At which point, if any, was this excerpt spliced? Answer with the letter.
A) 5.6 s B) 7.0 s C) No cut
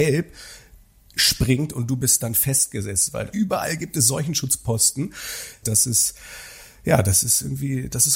A